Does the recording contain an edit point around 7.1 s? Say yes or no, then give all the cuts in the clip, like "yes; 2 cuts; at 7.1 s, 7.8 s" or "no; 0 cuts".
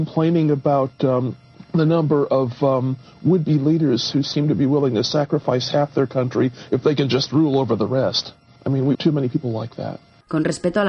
no; 2 cuts; at 1.7 s, 8.9 s